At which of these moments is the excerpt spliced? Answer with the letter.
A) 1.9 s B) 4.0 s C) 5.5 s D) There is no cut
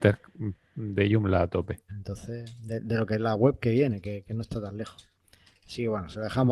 A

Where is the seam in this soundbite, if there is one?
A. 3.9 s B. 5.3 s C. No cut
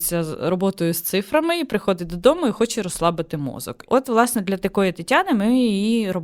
A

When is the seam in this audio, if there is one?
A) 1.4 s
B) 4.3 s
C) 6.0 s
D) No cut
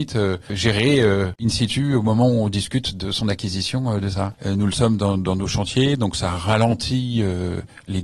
B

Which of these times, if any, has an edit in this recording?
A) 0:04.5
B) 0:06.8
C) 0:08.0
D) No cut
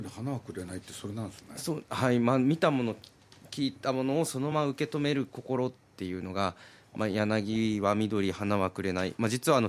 A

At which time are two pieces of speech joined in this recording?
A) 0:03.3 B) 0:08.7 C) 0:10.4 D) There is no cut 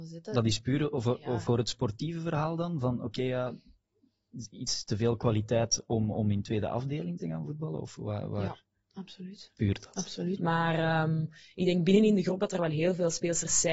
C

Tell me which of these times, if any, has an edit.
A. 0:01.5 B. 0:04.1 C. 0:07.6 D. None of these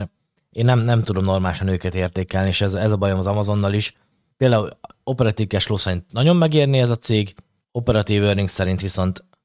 C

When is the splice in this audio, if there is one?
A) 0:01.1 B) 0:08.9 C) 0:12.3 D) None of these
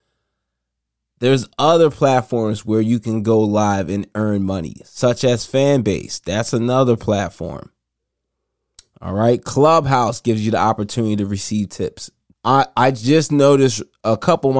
C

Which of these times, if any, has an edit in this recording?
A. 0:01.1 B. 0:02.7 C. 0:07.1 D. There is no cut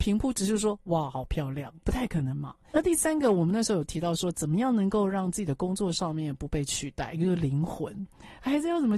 B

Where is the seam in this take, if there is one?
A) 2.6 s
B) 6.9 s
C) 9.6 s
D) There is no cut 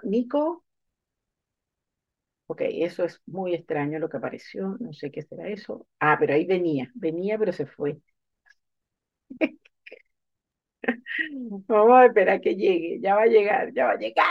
D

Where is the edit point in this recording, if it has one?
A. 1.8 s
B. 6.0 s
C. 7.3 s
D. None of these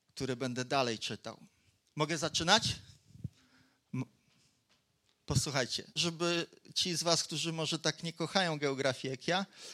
B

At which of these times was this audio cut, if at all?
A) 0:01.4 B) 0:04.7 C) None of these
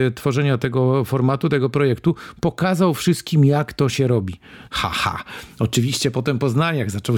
B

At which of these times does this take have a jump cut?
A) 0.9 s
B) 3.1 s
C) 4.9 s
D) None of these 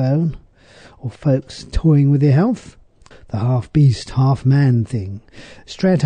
B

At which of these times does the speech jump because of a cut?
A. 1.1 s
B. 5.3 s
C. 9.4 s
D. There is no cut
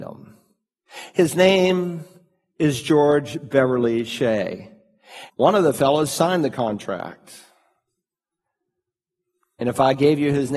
B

